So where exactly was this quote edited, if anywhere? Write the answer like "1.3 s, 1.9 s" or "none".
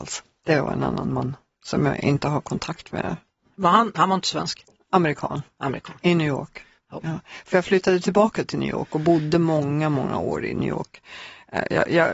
none

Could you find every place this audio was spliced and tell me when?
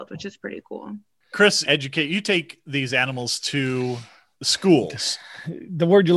1.6 s

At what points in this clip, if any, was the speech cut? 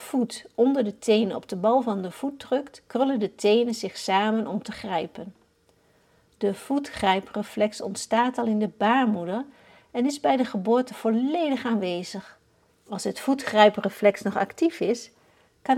12.7 s

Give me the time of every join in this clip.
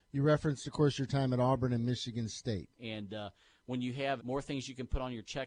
2.8 s, 4.2 s

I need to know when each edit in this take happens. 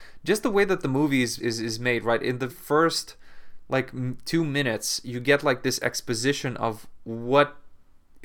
1.4 s, 2.5 s

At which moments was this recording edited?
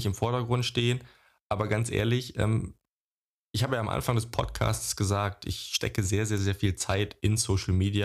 none

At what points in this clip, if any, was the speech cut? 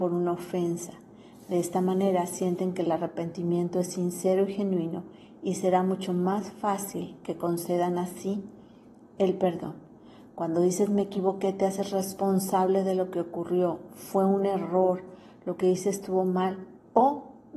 none

